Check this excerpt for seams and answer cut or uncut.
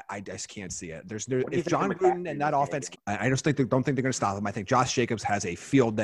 cut